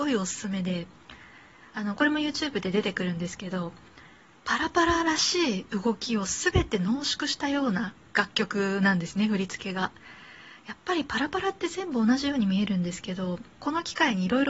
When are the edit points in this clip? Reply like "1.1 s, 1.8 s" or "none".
13.5 s